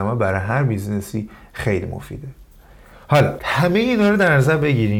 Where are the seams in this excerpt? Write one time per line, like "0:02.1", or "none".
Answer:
none